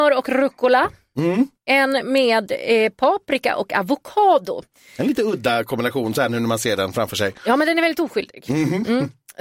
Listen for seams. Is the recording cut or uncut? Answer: uncut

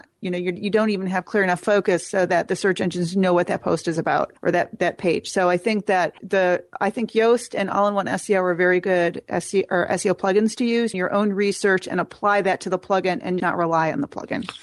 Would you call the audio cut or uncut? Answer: cut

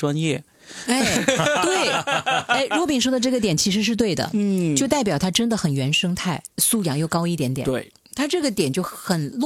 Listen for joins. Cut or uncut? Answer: cut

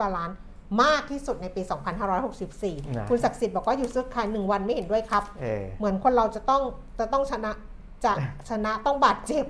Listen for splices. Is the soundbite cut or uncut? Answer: uncut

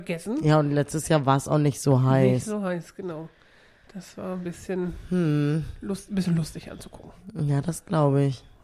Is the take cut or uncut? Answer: uncut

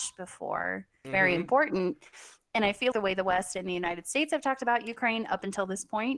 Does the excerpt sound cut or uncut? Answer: cut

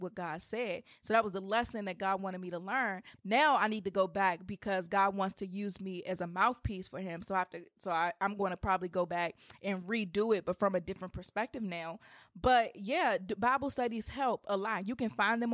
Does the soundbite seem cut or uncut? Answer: cut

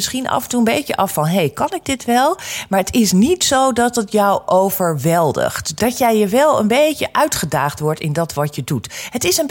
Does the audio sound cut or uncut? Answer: cut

